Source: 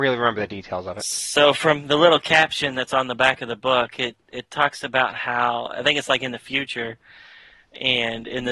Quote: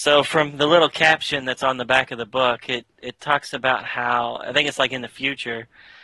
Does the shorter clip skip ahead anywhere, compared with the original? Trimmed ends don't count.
no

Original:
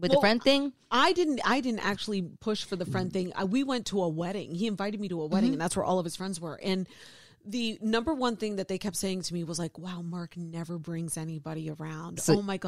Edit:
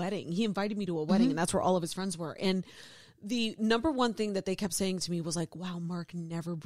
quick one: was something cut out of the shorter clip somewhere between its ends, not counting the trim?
no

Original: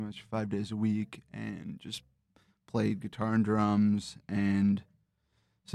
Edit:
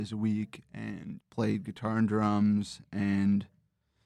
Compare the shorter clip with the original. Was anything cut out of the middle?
yes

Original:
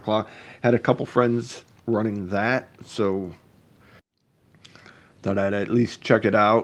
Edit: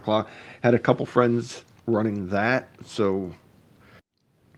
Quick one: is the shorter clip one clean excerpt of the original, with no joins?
yes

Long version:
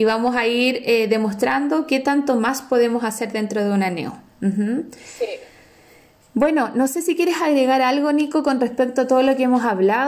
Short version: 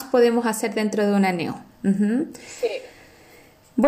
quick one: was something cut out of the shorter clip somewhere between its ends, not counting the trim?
no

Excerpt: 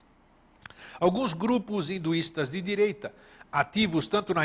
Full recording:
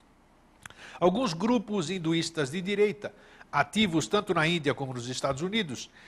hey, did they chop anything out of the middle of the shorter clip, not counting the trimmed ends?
no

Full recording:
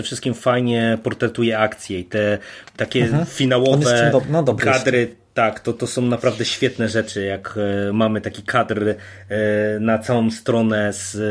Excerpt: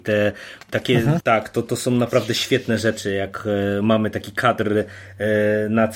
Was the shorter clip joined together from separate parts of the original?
yes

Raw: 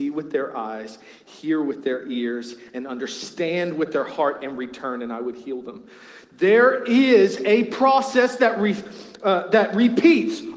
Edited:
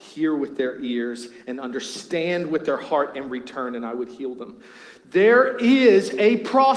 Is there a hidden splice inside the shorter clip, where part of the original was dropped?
no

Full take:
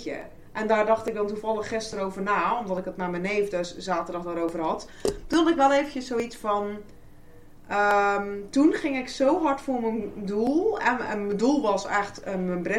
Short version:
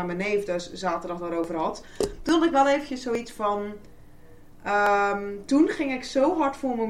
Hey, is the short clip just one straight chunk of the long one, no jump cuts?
yes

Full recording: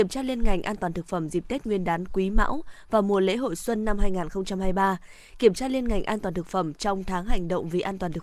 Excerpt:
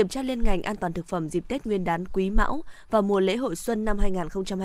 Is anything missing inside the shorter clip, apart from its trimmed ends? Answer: no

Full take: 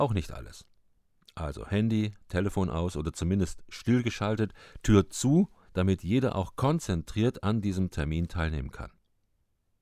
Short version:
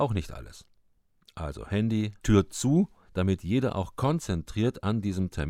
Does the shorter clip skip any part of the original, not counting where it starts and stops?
yes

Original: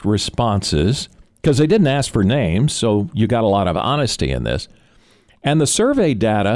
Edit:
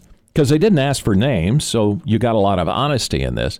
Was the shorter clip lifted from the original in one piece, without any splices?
yes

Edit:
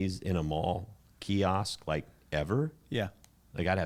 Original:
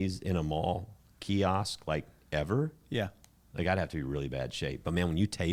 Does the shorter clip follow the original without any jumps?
yes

